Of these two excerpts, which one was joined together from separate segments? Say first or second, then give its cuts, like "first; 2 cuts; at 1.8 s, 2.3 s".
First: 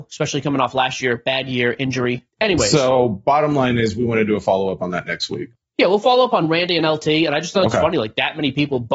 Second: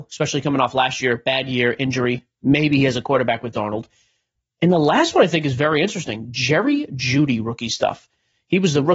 first; 1 cut; at 2.3 s